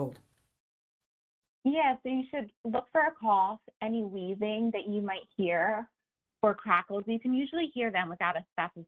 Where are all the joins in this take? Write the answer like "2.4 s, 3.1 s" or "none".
none